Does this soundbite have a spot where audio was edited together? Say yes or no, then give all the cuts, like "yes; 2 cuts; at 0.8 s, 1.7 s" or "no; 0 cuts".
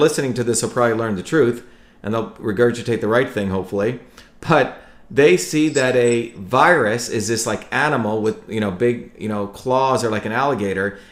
no; 0 cuts